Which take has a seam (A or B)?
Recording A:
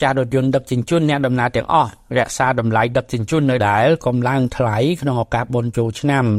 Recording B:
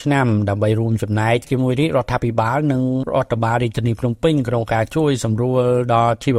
A